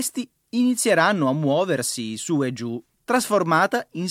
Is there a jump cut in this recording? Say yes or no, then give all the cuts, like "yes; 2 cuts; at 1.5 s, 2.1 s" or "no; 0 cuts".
yes; 1 cut; at 2.9 s